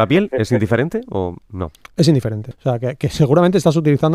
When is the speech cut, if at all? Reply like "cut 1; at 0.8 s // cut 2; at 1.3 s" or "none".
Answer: cut 1; at 2.5 s